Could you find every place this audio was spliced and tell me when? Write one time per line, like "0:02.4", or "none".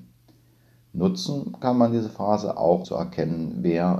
0:02.8